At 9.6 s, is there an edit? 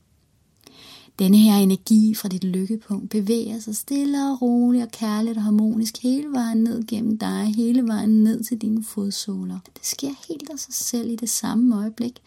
yes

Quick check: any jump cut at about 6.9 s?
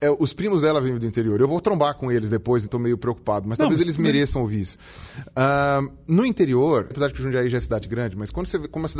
yes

